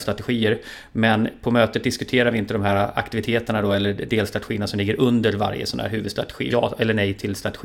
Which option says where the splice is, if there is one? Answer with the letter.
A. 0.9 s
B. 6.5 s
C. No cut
B